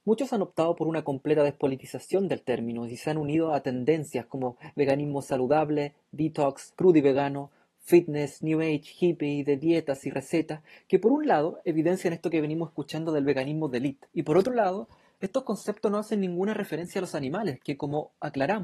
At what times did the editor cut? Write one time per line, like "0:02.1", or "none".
0:06.7
0:14.1